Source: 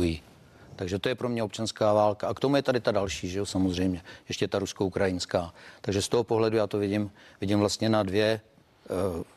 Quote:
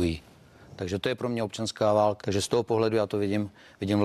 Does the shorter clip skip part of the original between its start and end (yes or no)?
yes